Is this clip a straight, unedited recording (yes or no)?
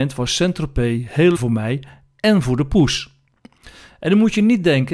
no